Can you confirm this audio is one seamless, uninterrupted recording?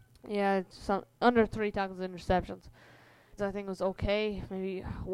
no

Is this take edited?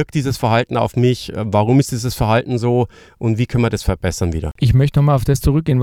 no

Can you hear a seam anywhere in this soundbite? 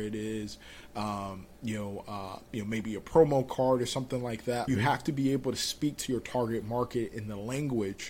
yes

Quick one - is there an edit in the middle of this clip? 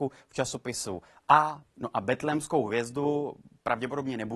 yes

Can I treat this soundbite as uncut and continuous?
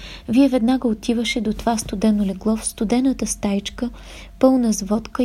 yes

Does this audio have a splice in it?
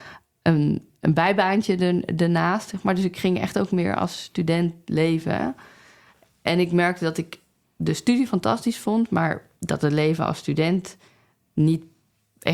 no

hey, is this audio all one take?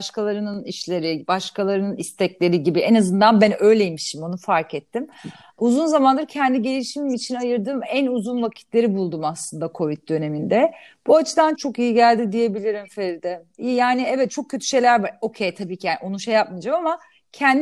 no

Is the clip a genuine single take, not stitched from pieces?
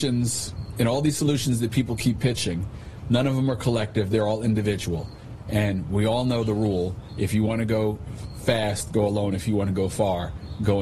yes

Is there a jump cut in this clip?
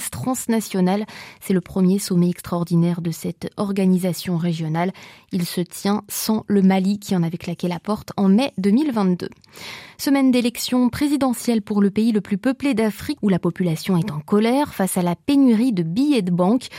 yes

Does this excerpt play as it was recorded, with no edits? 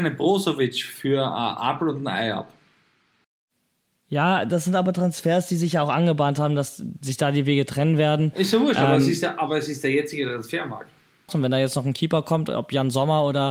no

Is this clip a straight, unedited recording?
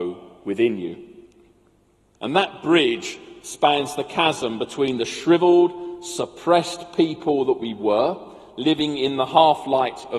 no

